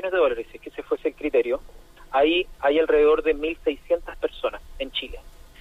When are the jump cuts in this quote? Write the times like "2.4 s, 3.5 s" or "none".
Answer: 2.5 s